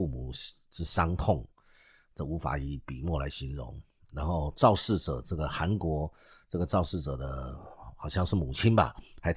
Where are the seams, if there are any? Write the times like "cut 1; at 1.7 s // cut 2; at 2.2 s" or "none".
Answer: none